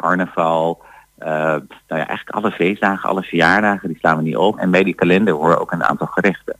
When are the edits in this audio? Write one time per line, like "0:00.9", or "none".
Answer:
0:04.6